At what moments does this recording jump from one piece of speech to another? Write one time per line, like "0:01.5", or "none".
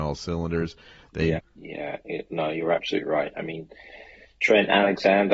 0:01.4